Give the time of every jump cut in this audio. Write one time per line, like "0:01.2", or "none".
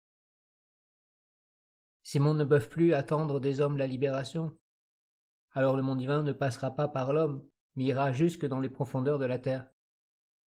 none